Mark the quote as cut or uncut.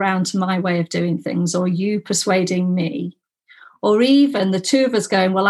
uncut